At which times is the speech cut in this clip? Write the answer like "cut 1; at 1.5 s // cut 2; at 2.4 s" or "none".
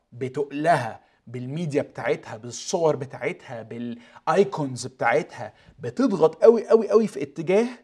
cut 1; at 6.4 s